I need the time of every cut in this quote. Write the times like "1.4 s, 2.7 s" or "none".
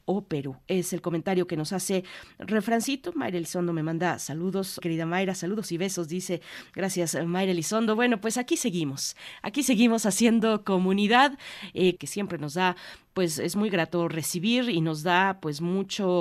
4.8 s, 12.0 s